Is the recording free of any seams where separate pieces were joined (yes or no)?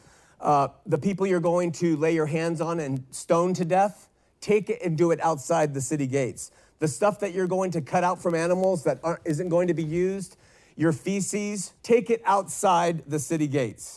no